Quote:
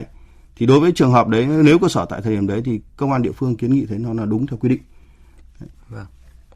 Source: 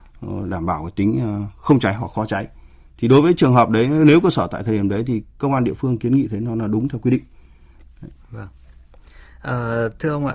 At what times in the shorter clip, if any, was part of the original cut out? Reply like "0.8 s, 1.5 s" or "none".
none